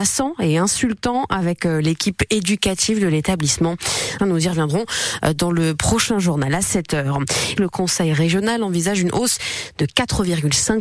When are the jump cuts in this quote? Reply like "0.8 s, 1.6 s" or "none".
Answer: 4.2 s, 7.6 s